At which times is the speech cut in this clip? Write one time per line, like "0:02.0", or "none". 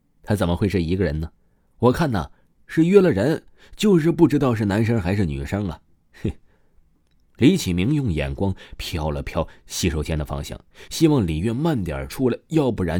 none